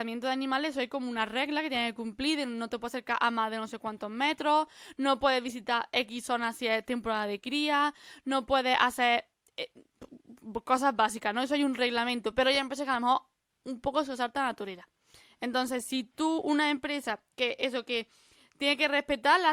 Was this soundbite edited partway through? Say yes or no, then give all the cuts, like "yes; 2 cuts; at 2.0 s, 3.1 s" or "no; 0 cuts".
no; 0 cuts